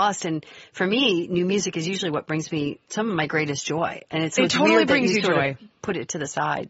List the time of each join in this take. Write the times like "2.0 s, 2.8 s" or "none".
2.8 s